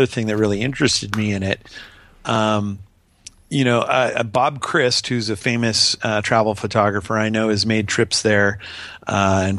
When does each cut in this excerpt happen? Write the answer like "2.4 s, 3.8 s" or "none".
none